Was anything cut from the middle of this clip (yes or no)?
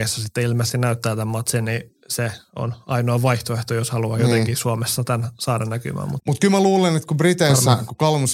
no